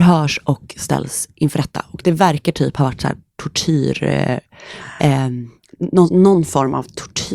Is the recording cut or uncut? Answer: uncut